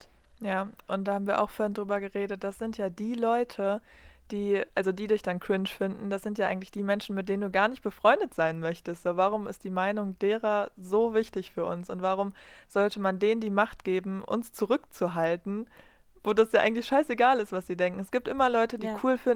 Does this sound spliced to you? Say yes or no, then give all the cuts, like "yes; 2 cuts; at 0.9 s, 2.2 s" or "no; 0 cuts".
no; 0 cuts